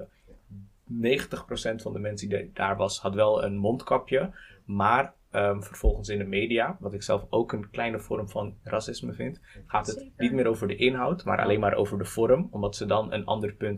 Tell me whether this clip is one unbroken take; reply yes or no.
yes